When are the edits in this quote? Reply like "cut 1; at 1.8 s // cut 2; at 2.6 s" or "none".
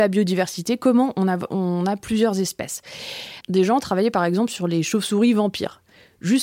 cut 1; at 3.4 s